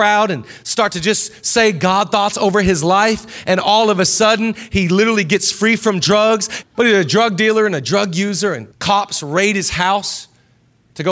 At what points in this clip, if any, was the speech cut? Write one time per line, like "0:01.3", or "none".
0:06.6
0:08.7